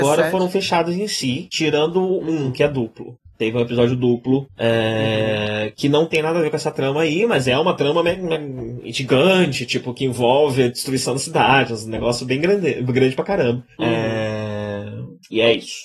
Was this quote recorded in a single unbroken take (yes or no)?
yes